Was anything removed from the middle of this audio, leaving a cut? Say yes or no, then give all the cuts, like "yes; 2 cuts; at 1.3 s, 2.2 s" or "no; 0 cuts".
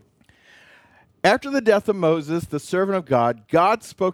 no; 0 cuts